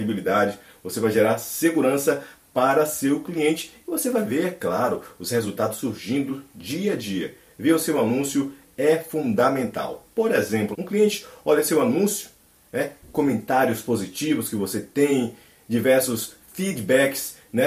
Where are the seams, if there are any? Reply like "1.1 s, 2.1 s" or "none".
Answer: 10.7 s

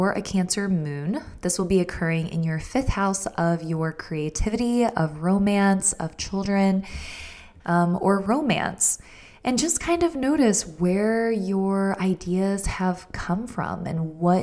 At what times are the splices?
7.6 s

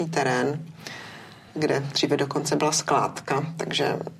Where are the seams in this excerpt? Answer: none

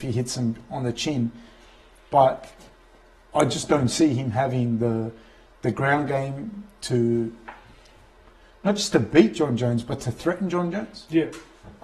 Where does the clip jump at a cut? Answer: none

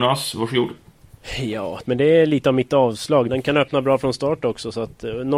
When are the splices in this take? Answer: 1.9 s, 3.3 s

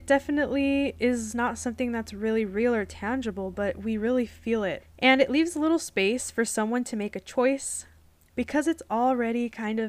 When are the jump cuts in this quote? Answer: 4.8 s

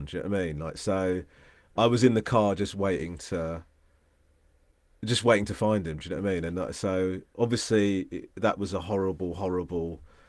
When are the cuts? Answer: none

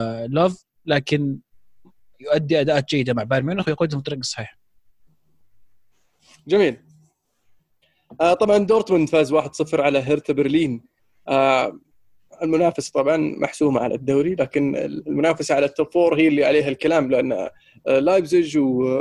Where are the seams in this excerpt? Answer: none

